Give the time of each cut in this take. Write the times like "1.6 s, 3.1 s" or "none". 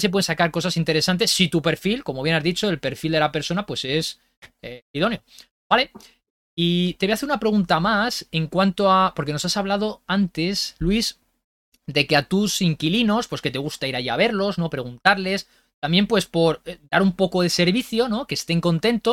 none